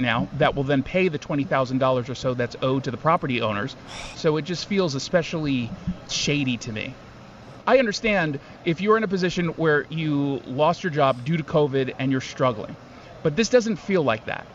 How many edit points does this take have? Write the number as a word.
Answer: two